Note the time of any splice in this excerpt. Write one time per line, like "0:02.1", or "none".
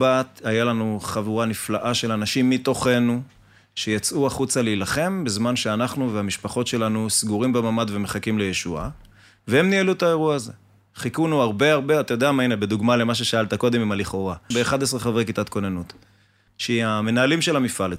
0:14.5
0:16.5